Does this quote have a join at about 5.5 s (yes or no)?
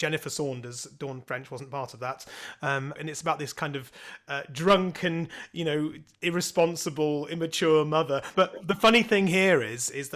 no